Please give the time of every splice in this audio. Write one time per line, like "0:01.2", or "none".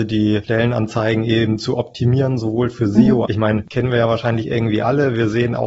0:03.2